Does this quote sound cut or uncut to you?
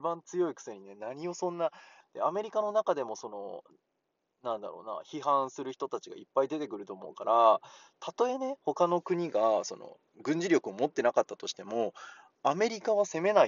cut